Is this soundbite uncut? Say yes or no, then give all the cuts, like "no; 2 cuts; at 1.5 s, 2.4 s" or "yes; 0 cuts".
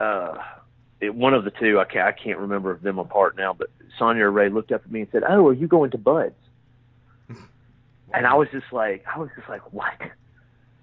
yes; 0 cuts